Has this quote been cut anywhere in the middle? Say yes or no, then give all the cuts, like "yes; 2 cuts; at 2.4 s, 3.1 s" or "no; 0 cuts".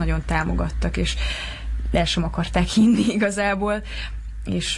no; 0 cuts